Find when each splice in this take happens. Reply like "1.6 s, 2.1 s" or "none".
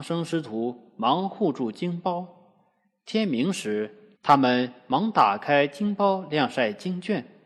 4.1 s